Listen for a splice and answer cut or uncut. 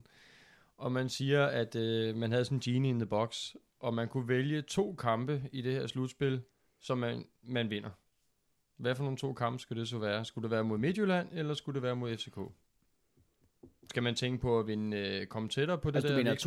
uncut